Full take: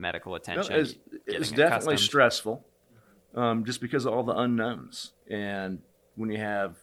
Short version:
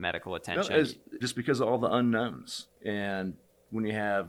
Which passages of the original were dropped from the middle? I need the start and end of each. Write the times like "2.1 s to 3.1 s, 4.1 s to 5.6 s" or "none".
1.2 s to 3.7 s